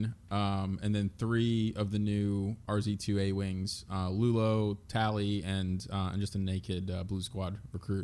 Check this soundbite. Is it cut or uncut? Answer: uncut